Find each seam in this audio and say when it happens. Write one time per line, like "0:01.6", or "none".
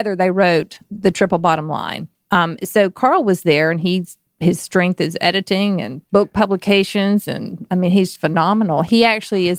0:08.1